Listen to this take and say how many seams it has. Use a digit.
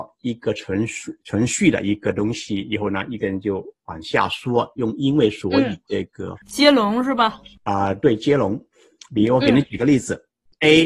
1